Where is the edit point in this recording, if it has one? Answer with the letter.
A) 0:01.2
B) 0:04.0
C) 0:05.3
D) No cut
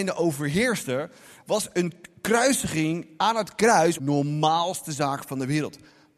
B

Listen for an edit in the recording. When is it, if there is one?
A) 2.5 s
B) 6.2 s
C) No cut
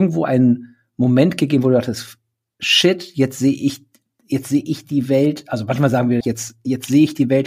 B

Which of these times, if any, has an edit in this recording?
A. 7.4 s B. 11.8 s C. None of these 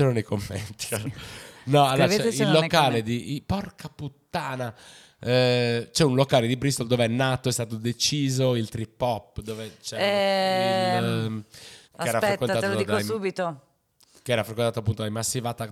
B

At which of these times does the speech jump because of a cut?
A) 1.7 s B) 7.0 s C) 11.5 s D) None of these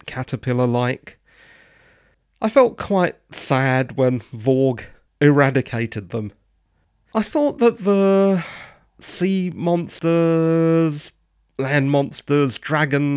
B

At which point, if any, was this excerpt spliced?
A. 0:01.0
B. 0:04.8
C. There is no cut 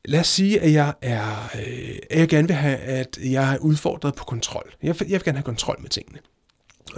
C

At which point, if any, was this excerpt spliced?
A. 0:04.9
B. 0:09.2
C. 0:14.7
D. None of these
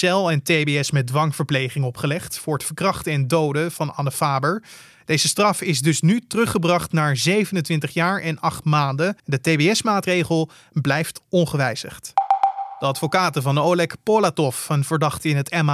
B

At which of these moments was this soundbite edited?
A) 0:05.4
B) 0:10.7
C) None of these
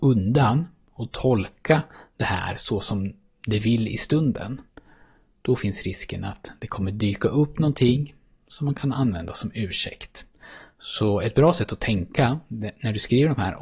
C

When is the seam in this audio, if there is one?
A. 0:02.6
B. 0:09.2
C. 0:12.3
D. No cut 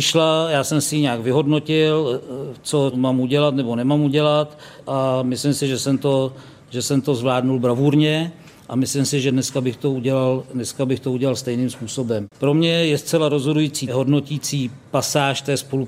C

